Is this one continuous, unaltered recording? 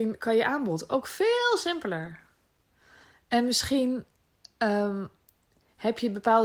yes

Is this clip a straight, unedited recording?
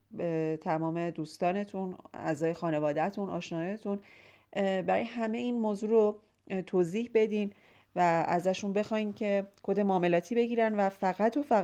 yes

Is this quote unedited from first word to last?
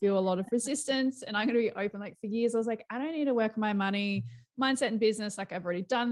yes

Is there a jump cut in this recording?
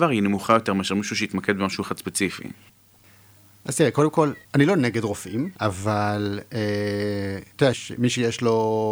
yes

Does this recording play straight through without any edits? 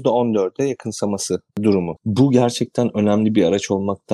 no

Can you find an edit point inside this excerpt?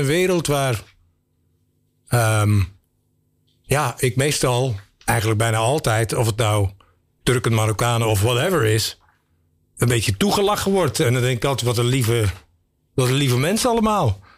no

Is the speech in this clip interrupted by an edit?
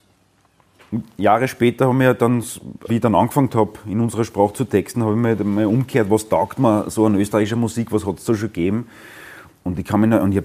yes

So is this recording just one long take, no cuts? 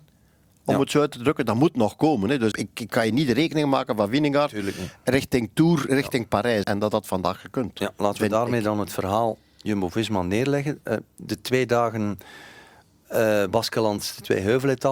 no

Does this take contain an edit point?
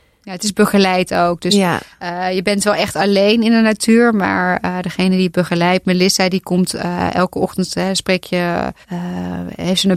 yes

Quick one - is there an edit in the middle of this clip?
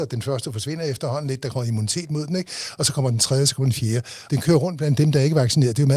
yes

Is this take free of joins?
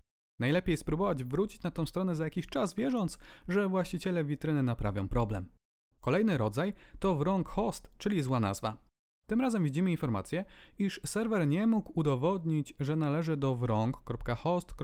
yes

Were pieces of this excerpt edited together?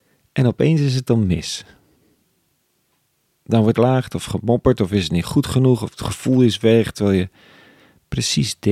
no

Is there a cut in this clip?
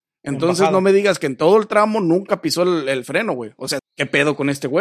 yes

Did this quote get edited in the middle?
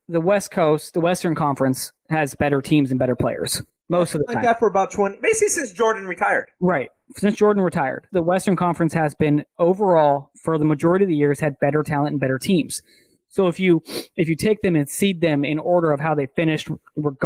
yes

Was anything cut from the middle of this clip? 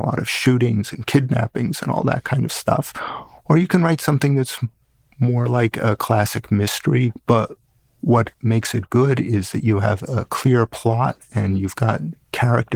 yes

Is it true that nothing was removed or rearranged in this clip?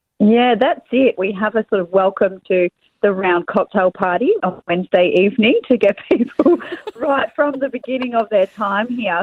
no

